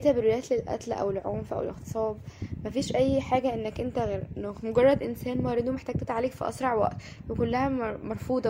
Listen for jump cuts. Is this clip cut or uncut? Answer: cut